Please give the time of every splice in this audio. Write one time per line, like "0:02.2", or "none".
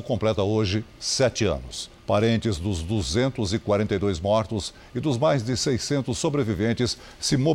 0:02.0